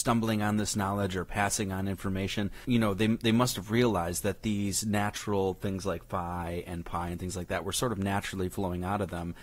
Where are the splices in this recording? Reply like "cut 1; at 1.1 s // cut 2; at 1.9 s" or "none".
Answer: cut 1; at 2.6 s